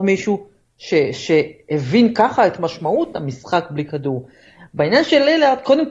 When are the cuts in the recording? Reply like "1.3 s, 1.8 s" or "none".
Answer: none